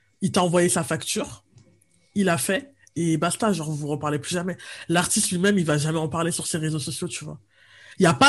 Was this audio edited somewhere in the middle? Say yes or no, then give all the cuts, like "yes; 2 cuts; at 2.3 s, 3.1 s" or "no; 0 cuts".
no; 0 cuts